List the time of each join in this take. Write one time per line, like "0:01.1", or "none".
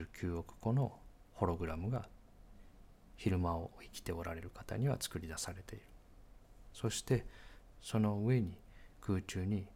none